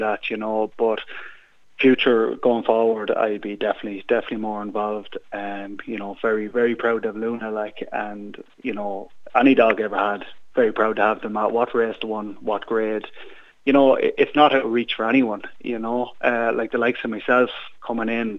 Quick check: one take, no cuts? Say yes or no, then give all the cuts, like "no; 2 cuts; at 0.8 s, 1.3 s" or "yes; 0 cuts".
no; 1 cut; at 13.5 s